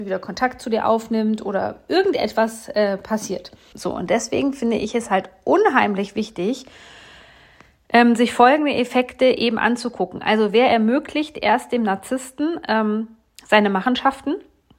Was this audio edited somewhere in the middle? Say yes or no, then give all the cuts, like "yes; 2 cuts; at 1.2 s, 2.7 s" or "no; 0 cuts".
yes; 1 cut; at 3.7 s